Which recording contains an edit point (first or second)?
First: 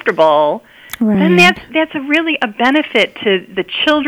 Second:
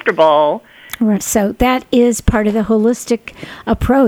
second